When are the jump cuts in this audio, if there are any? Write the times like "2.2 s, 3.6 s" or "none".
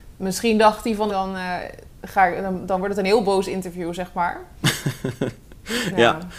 1.1 s